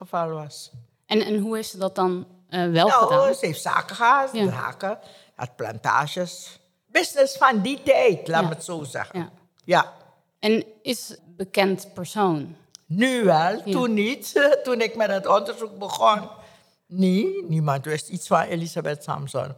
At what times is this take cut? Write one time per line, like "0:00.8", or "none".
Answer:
0:06.8
0:11.2